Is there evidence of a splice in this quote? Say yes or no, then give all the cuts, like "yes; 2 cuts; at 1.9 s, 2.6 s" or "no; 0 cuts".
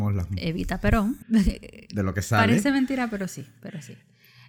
yes; 1 cut; at 1.2 s